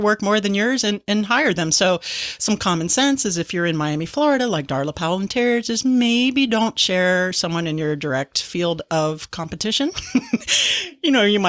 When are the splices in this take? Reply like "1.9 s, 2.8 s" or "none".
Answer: none